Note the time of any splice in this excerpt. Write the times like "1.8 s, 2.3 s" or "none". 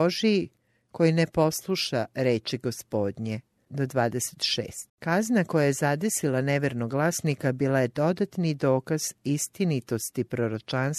3.7 s, 4.9 s

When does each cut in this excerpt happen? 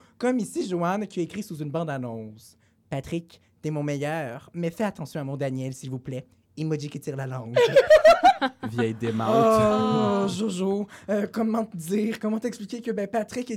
none

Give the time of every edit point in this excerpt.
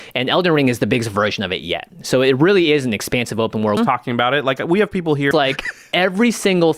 3.8 s, 5.3 s

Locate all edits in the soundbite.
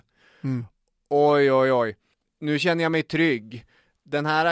none

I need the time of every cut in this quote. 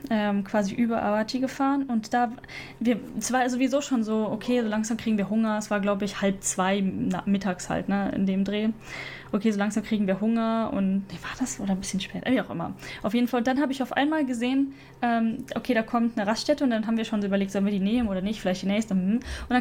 none

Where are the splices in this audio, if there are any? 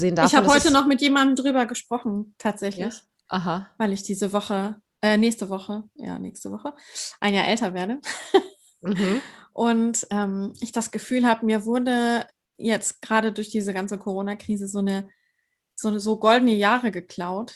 6.0 s

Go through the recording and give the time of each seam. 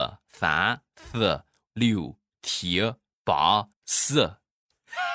1.7 s, 3.7 s

